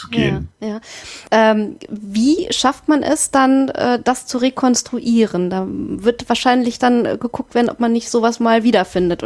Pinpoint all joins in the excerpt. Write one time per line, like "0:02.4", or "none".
0:01.3